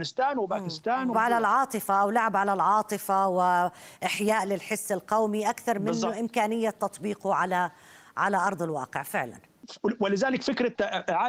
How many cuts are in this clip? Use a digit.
1